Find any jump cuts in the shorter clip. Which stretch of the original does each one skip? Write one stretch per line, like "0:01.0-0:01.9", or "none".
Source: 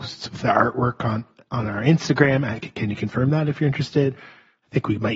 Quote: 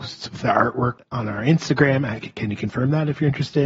0:01.0-0:01.4